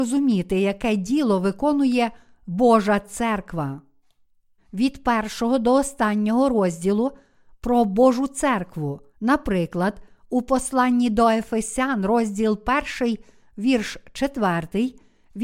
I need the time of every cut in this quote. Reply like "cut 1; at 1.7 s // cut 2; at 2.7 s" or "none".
cut 1; at 4.6 s // cut 2; at 9.1 s